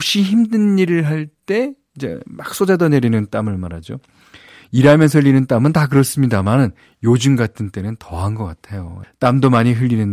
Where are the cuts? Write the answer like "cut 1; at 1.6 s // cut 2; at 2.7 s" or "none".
cut 1; at 9.0 s